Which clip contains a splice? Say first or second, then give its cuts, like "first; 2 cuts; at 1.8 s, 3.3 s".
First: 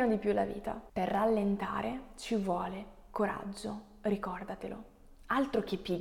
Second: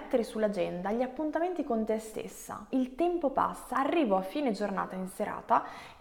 second; 2 cuts; at 2.7 s, 3.7 s